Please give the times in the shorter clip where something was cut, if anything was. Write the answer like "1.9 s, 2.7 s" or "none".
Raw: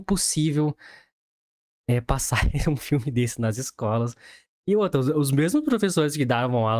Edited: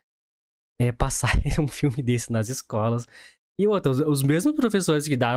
none